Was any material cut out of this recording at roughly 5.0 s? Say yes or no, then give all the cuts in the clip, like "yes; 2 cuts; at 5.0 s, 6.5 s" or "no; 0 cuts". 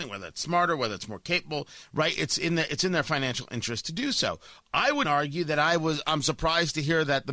yes; 1 cut; at 5.0 s